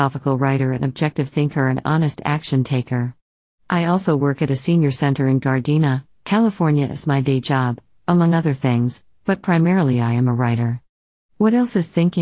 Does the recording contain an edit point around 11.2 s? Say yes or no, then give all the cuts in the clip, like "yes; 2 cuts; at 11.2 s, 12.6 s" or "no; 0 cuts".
yes; 1 cut; at 11.2 s